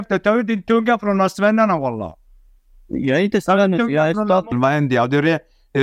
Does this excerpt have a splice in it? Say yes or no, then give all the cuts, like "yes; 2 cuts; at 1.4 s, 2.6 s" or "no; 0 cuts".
yes; 1 cut; at 4.5 s